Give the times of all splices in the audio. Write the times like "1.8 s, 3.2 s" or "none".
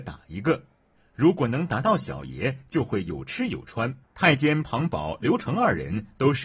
4.0 s